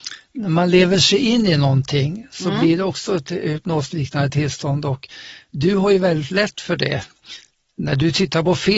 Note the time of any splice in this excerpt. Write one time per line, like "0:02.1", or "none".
none

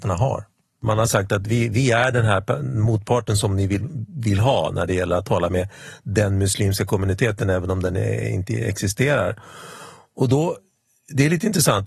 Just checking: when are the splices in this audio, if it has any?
none

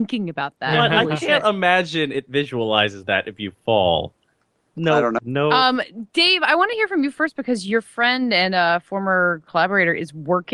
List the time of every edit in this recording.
0:05.2

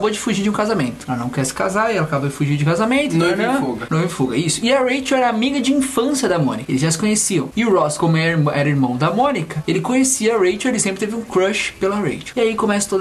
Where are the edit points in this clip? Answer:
none

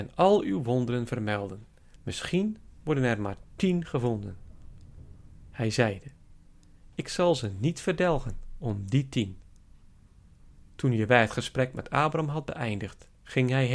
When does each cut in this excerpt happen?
0:01.9

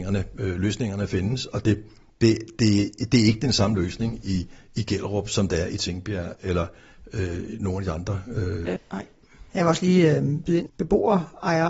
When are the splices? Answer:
0:08.8
0:10.7

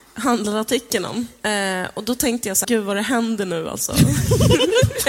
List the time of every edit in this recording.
0:02.6

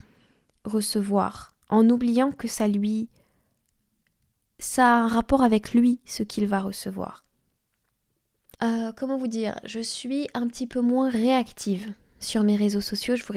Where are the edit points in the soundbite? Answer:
0:01.6
0:08.5

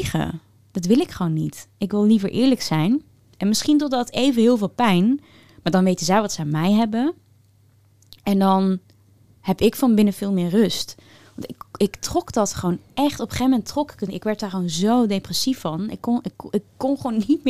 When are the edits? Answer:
none

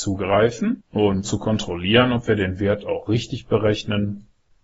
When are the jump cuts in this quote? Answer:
0:01.2

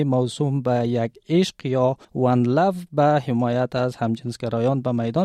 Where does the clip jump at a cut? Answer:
0:02.0

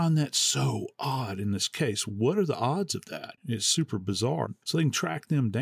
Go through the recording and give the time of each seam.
0:03.4
0:04.6

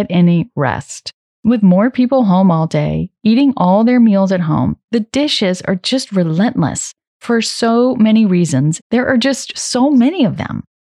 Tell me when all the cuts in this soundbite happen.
0:01.3
0:07.1
0:08.8

